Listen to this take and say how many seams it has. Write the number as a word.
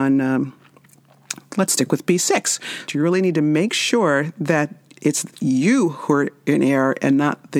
two